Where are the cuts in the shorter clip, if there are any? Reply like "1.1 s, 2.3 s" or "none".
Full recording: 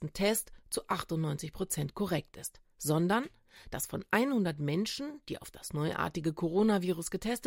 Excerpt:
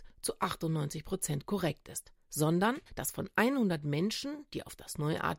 2.9 s

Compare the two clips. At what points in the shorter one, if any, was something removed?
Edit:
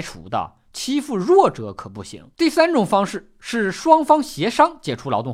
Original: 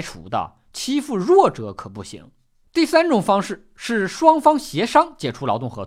2.3 s

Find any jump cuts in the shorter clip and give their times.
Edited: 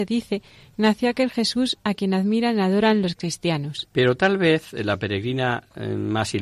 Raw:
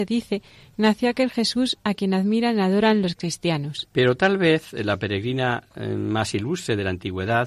none

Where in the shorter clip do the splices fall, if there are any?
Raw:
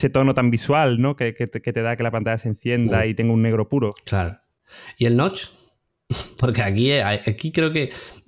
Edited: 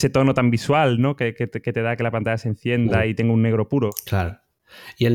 none

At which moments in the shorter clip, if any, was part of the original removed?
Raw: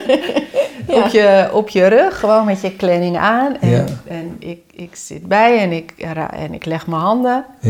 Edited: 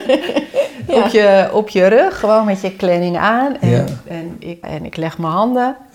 4.6 s

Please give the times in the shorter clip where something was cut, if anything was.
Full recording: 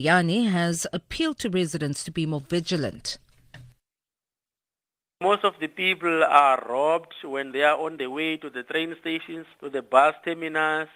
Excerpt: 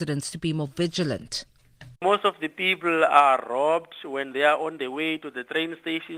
2.0 s

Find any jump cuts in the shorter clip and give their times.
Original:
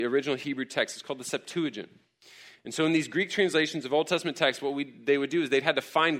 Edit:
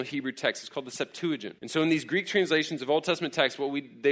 1.6 s

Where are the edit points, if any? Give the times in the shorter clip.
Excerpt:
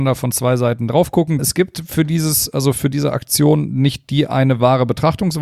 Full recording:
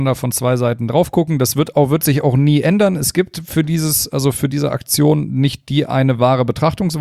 1.4 s

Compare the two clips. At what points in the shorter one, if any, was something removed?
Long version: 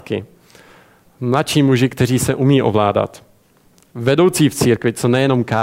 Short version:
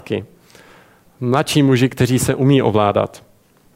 none

